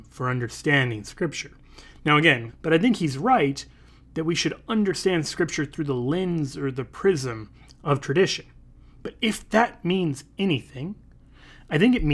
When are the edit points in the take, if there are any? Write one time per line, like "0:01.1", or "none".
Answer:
0:02.5